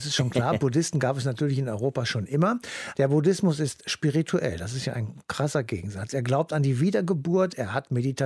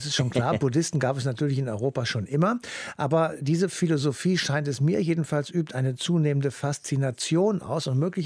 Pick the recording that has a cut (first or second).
first